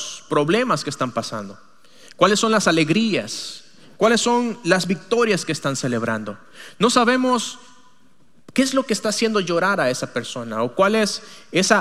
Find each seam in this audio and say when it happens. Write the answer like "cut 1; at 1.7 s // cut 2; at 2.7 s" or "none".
none